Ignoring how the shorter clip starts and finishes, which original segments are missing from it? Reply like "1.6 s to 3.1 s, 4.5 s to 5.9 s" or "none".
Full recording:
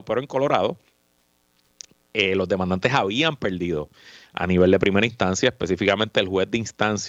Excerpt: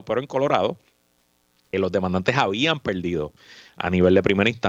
1.7 s to 2.3 s

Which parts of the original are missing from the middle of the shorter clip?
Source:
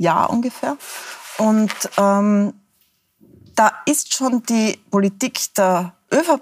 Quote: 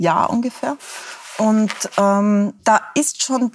2.6 s to 3.5 s

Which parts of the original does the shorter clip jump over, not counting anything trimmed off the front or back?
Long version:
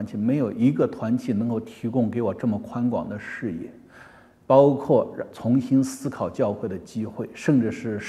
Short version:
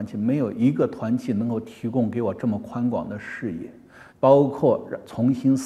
4.1 s to 4.4 s

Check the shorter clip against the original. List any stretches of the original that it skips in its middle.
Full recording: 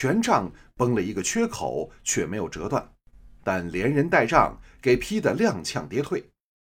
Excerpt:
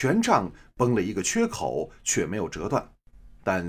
none

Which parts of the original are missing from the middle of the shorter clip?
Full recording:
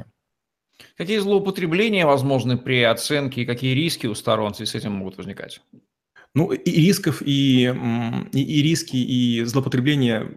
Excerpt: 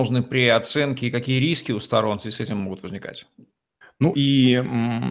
6.5 s to 7.2 s

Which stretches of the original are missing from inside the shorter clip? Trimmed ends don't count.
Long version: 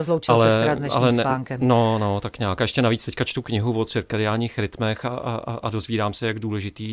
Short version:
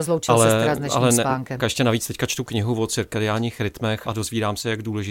1.6 s to 2.6 s, 5.0 s to 5.6 s

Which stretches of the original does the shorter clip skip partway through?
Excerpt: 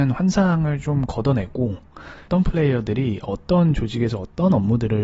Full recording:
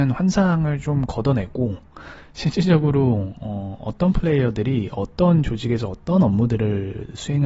2.3 s to 4.0 s

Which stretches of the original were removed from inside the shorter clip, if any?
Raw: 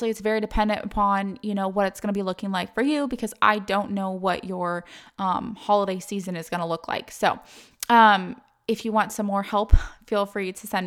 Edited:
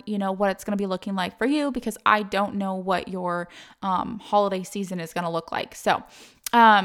none

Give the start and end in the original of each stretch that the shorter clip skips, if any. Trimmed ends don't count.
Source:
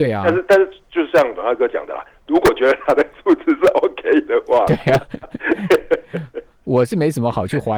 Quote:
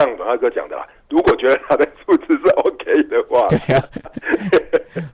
none

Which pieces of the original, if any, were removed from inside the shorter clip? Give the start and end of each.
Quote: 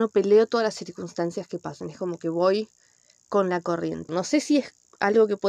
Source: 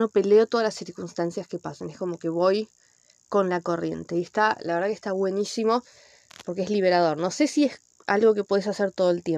4.1 s to 7.2 s

